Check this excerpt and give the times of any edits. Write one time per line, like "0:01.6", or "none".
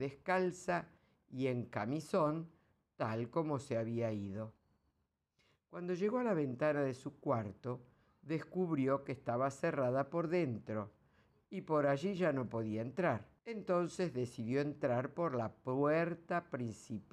0:13.4

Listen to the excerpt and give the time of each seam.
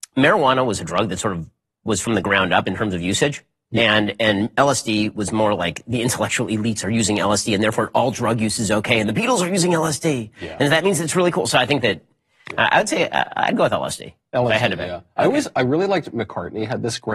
none

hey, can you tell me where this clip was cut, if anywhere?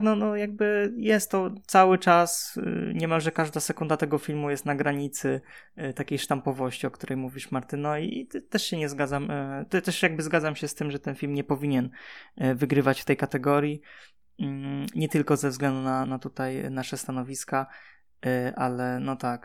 none

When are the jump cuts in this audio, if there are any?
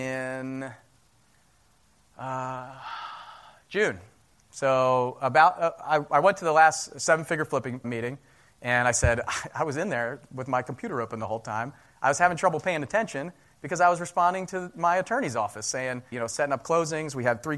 0:07.8
0:16.1

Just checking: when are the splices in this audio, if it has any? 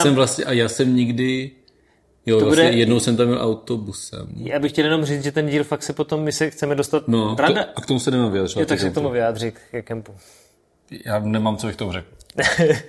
0:07.4

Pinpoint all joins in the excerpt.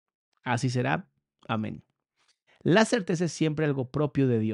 0:02.5

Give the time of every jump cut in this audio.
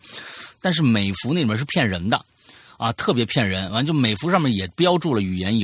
none

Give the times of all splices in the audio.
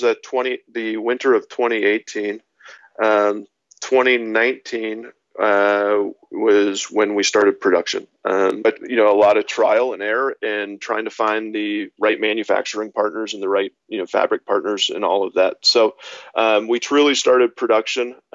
0:08.6

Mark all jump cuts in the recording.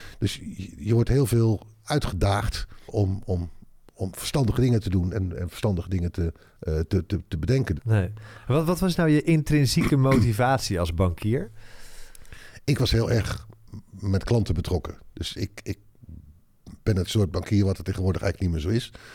0:02.9
0:07.8

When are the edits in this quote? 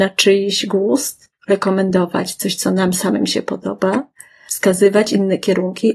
0:04.5

